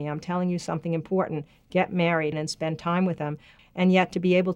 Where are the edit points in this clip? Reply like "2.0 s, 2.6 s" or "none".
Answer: 2.3 s, 3.6 s